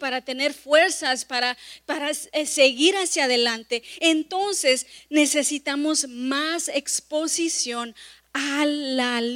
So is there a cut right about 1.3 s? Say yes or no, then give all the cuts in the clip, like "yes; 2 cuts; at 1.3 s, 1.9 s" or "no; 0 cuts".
no; 0 cuts